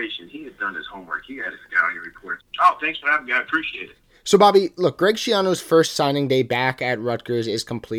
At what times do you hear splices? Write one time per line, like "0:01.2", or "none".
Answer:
0:02.4